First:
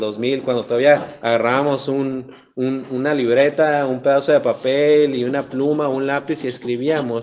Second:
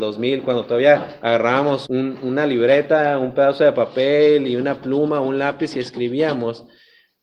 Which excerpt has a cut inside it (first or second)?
second